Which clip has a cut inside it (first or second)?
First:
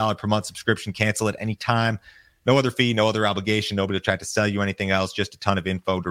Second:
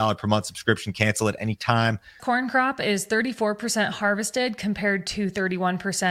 second